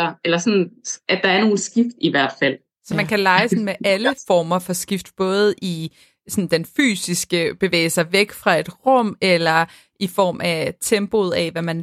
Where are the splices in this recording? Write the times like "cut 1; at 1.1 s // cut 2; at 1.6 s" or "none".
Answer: none